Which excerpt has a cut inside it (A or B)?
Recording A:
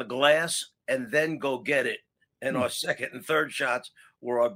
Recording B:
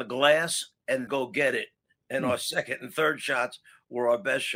B